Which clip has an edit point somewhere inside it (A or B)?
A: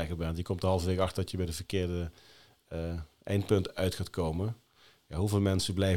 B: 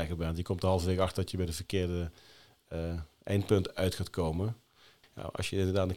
B